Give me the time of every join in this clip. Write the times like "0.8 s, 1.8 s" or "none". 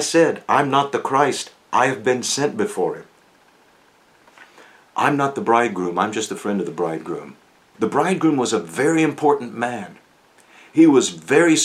7.7 s